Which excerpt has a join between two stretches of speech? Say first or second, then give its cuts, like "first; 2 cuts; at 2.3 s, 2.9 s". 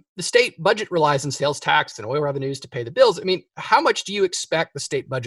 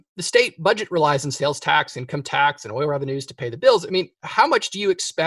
first; 1 cut; at 1.9 s